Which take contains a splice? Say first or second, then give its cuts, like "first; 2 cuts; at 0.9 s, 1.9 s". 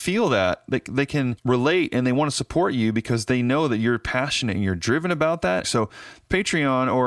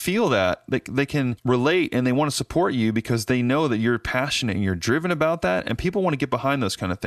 first; 1 cut; at 5.6 s